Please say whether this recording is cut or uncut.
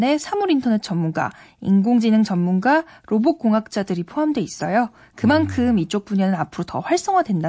uncut